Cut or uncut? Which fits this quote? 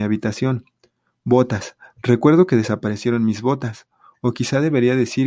uncut